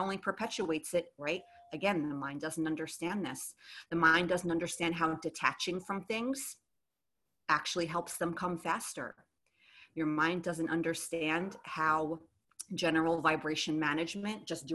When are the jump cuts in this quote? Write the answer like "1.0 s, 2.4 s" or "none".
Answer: 1.2 s